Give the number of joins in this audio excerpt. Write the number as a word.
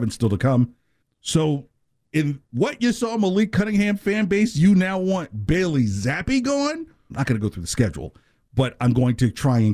two